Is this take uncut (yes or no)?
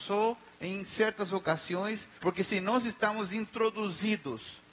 no